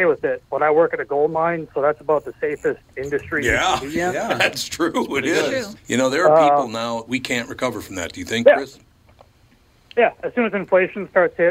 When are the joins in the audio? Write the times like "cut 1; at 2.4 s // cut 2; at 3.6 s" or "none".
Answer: cut 1; at 5.8 s // cut 2; at 7.1 s